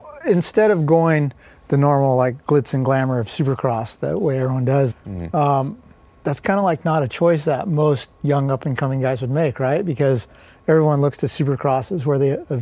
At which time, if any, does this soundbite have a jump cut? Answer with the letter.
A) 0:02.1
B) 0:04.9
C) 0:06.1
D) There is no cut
B